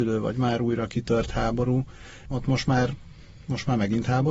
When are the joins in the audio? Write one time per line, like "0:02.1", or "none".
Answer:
0:02.3